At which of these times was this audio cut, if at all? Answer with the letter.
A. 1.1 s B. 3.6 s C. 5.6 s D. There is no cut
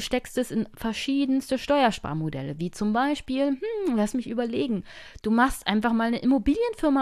D